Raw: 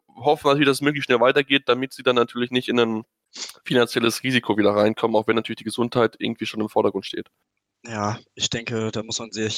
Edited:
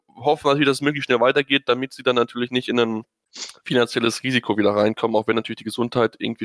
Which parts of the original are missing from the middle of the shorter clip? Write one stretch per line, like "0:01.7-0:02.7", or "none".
none